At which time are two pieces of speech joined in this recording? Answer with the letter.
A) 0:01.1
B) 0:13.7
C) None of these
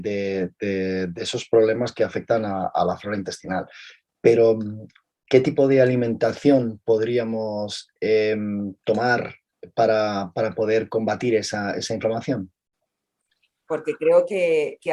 B